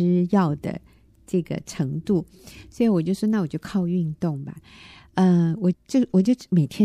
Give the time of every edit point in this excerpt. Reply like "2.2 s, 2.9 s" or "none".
5.7 s